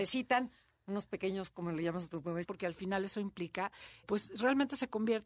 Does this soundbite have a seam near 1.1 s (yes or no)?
no